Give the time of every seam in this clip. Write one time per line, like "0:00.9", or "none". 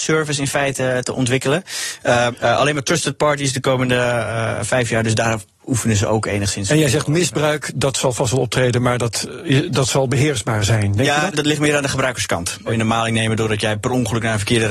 0:02.3
0:11.3
0:12.7